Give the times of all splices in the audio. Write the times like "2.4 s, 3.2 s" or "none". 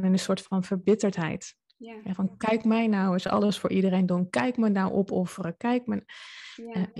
none

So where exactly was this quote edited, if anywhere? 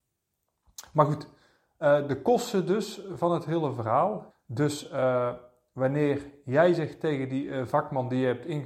4.3 s

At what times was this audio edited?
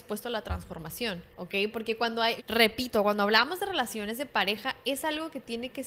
1.3 s, 2.4 s

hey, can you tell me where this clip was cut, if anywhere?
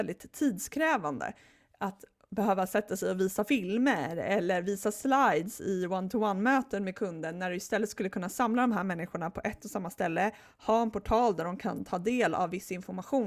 none

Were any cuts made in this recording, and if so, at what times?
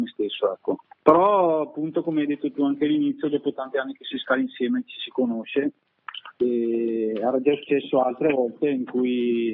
1.0 s

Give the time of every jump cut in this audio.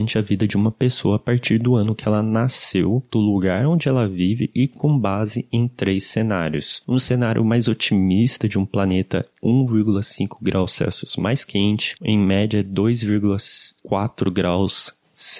12.0 s

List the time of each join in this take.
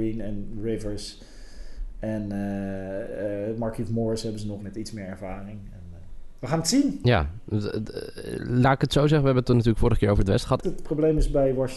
4.6 s, 6.4 s, 10.6 s

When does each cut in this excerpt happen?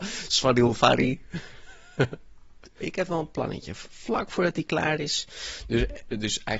2.8 s

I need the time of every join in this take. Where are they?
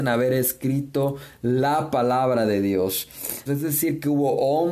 3.5 s

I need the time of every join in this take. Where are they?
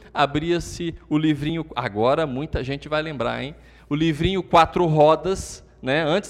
none

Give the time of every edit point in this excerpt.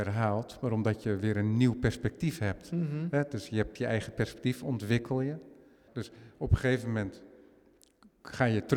5.9 s

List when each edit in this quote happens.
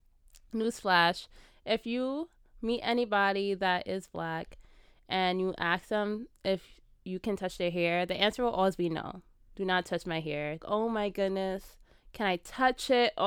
10.6 s

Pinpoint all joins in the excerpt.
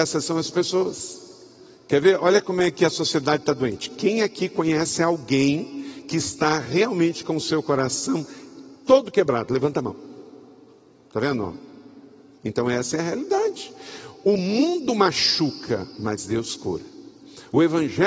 none

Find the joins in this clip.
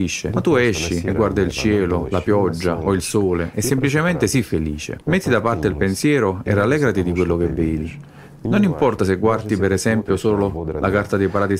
none

